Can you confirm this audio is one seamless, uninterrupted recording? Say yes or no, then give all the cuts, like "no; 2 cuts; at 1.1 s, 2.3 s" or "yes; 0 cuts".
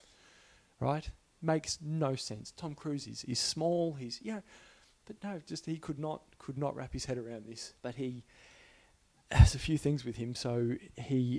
no; 1 cut; at 7.8 s